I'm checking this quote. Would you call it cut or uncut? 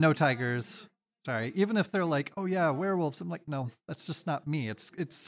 uncut